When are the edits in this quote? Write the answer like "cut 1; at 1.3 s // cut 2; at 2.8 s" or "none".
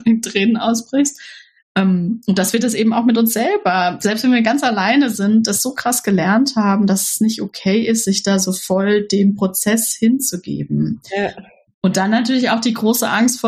none